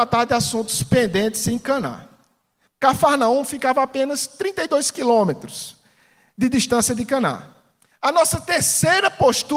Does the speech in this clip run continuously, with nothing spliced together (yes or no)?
no